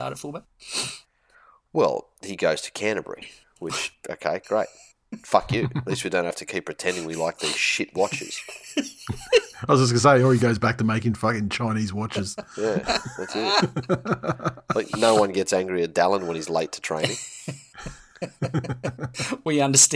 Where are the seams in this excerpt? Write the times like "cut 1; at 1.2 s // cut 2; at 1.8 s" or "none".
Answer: none